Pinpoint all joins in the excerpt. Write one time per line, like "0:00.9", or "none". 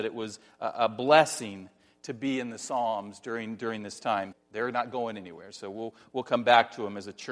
0:04.3